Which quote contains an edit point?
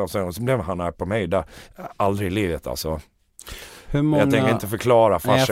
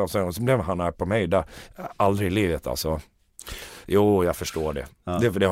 second; 1 cut; at 3.8 s

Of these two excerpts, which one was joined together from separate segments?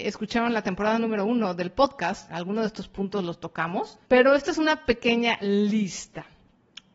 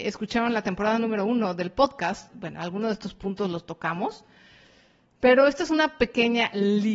first; 2 cuts; at 2.3 s, 4.0 s

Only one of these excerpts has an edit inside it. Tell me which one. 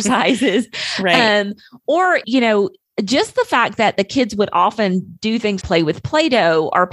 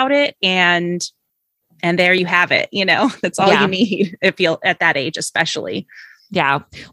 first; 2 cuts; at 2.2 s, 5.6 s

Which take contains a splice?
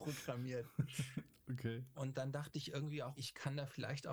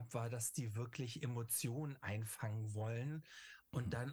first; 2 cuts; at 1.9 s, 3.2 s

